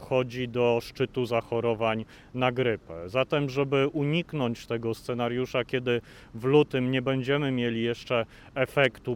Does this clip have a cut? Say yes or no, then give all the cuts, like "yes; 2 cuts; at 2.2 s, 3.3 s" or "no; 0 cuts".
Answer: yes; 1 cut; at 5.0 s